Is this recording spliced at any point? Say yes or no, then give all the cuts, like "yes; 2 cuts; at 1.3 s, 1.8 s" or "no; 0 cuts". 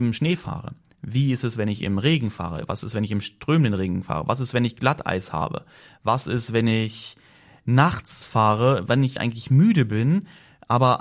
no; 0 cuts